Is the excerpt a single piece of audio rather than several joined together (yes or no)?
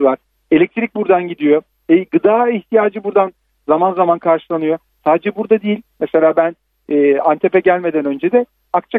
yes